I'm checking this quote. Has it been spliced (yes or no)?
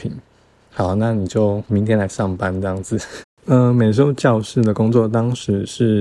yes